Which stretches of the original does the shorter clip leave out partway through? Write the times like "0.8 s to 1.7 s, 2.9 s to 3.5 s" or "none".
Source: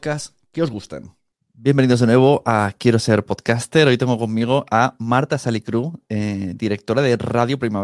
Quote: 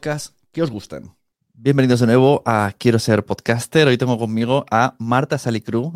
none